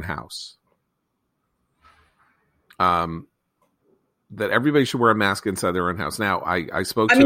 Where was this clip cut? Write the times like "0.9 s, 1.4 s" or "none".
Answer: none